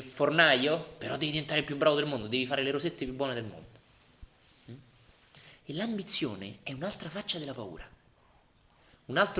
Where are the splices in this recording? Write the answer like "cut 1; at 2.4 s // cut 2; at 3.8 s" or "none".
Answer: cut 1; at 5.6 s